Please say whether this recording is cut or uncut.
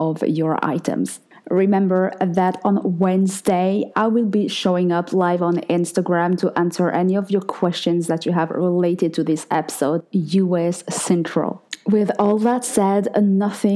cut